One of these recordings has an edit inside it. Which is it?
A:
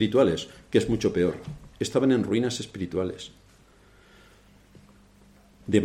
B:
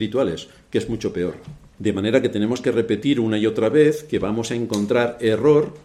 B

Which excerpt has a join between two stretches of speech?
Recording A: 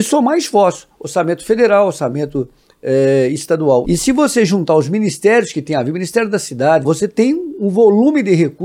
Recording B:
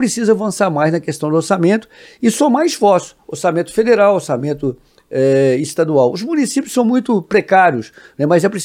A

